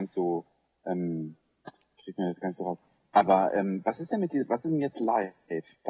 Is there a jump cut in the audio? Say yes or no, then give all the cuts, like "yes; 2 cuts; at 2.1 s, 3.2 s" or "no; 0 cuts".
no; 0 cuts